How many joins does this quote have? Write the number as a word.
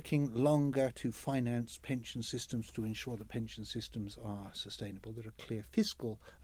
zero